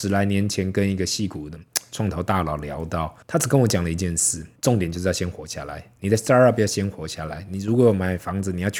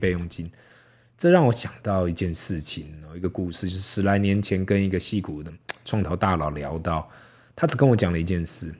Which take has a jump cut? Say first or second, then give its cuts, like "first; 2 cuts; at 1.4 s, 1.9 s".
first; 2 cuts; at 3.2 s, 4.6 s